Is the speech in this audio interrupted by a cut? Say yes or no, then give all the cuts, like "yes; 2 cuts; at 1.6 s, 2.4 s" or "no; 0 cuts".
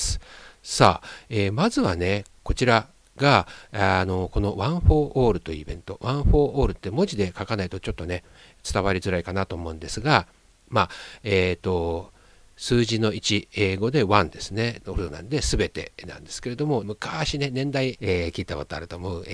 yes; 3 cuts; at 14.8 s, 16.8 s, 18.0 s